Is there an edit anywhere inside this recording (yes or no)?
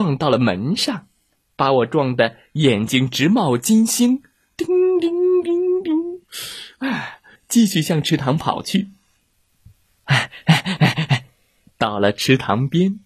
yes